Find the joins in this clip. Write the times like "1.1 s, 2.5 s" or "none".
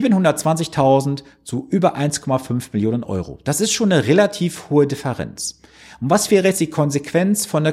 none